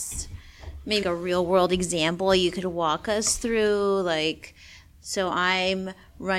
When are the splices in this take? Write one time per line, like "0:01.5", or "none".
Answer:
0:01.0